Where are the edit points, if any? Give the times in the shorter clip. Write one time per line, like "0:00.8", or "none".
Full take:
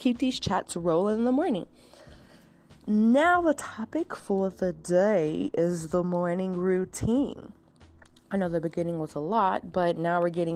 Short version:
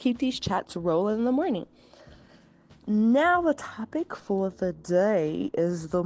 none

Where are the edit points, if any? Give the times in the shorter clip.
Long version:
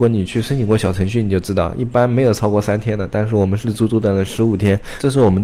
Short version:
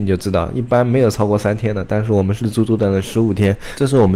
none

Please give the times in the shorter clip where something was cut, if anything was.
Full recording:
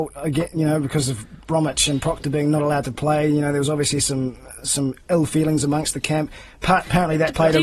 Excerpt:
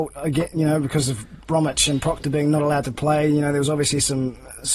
none

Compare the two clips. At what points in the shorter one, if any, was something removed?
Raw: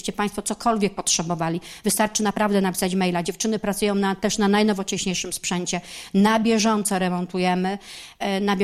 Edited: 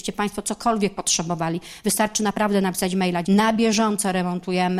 0:03.2

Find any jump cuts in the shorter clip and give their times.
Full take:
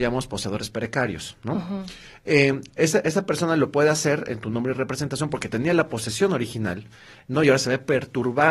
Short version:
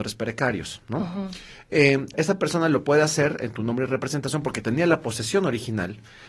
0:02.1

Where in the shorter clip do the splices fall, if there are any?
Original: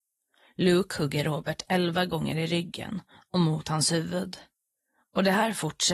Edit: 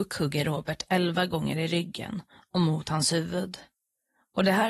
none

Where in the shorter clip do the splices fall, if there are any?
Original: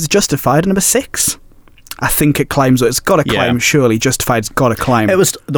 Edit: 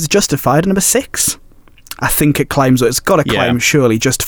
none

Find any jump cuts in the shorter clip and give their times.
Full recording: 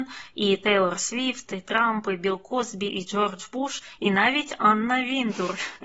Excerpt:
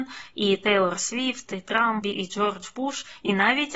0:02.0

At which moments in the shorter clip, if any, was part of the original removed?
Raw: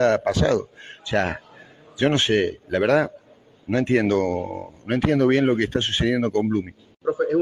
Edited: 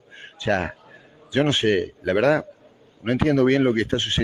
0:03.0

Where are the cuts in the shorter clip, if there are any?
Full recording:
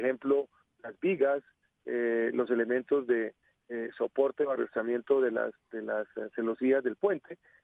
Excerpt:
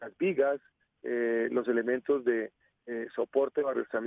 none

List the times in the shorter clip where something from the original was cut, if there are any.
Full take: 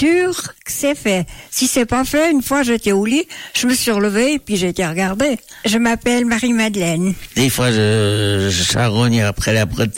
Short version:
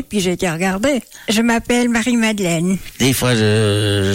none

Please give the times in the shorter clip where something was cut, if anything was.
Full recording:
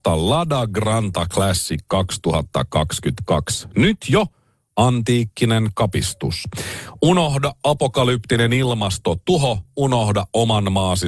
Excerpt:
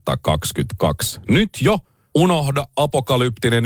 0:02.1

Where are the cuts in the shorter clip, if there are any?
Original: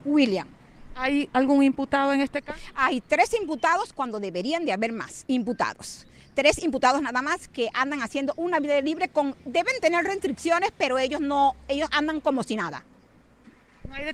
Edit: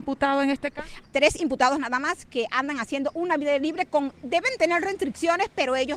0:01.0

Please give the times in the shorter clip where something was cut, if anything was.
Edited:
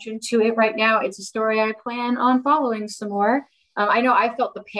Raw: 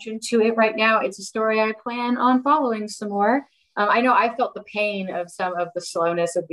none

